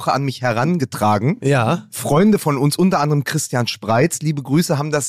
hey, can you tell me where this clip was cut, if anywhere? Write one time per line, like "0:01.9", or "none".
none

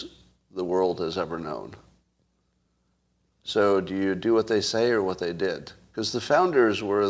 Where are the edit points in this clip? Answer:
none

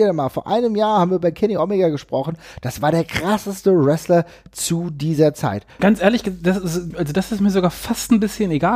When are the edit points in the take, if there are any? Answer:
0:05.8
0:06.9

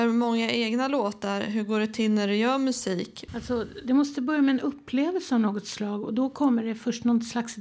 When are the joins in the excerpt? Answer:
0:03.3

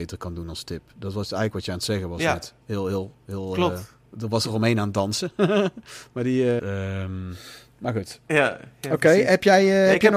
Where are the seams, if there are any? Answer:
0:02.6
0:06.6

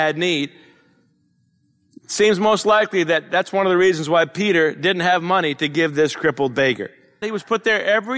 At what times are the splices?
0:07.2

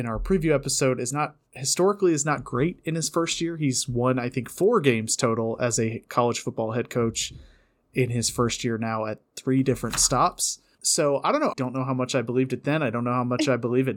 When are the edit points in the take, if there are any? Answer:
0:11.5

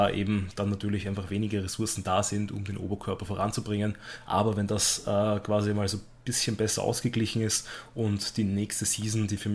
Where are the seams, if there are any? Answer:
none

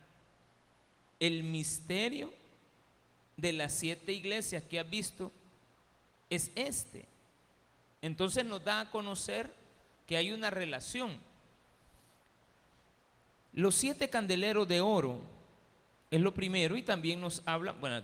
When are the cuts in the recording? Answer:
none

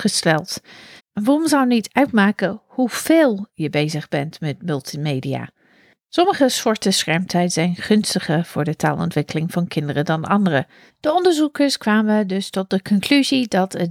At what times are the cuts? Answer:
0:01.0
0:10.9

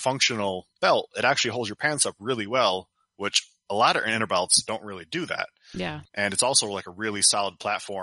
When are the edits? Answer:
0:06.1

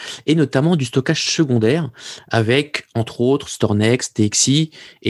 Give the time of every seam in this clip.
none

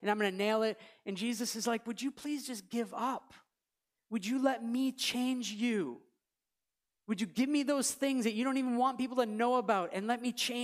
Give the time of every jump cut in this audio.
none

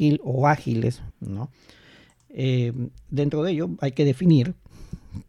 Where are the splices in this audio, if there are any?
0:01.1

